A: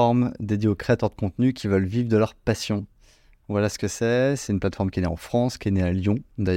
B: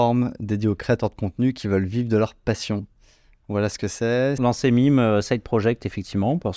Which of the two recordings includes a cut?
B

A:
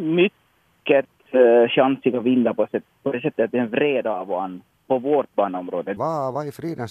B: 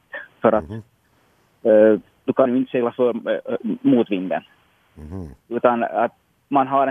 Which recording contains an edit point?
A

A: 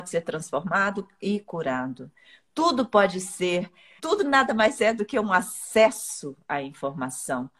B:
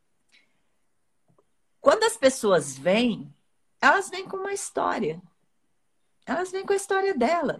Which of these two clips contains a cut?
A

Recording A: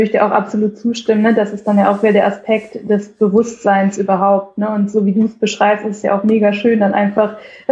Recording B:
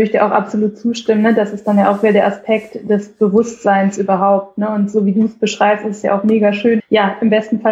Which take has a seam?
B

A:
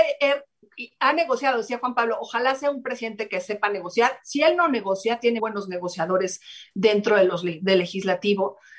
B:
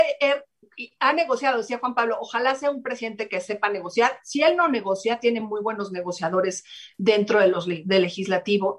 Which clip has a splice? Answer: A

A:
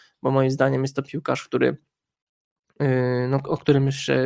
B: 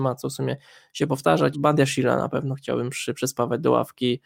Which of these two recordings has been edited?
B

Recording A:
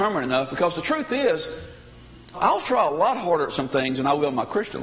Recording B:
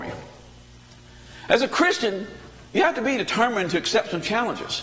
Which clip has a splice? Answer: A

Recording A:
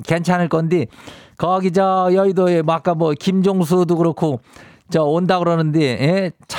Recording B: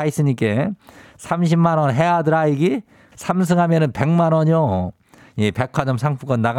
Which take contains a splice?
B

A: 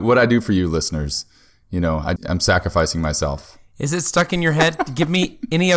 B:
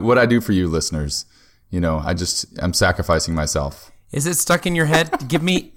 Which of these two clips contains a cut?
A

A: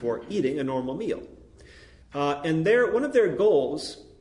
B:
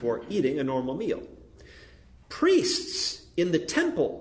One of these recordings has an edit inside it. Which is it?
A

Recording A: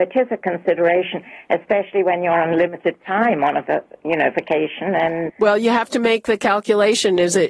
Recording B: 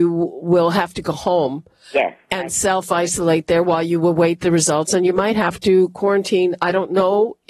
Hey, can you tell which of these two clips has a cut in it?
A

